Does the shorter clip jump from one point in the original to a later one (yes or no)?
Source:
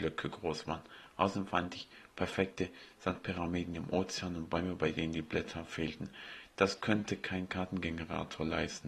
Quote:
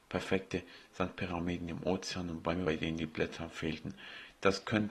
yes